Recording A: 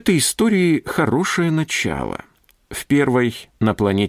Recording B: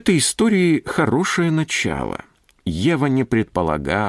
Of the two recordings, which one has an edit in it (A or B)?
B